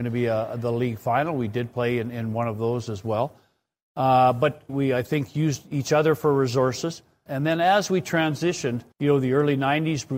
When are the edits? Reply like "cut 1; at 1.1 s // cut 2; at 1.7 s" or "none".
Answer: cut 1; at 4.7 s // cut 2; at 7.3 s // cut 3; at 8.9 s

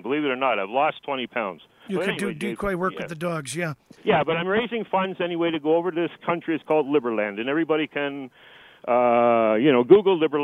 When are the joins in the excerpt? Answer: none

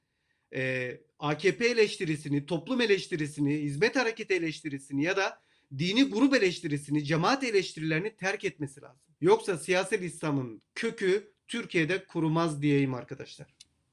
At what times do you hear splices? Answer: cut 1; at 9.2 s

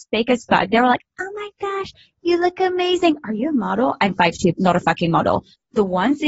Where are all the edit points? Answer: cut 1; at 4.5 s

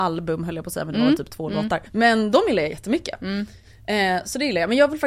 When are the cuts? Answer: cut 1; at 1.9 s

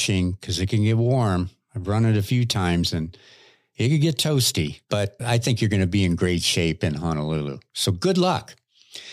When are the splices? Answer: cut 1; at 5.2 s

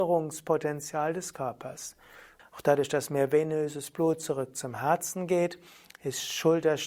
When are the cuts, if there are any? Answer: cut 1; at 2.4 s

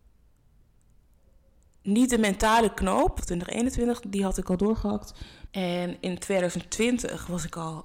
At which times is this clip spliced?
cut 1; at 3.2 s // cut 2; at 5.5 s

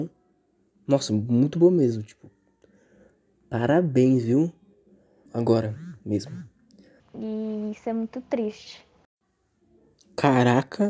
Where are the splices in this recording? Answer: cut 1; at 5.3 s // cut 2; at 7.0 s

